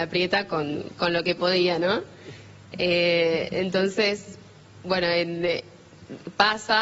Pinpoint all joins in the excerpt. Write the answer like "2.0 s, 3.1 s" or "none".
none